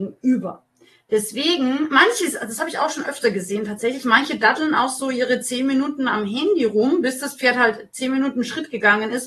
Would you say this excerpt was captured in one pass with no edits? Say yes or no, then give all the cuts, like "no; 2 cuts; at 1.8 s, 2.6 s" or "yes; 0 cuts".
yes; 0 cuts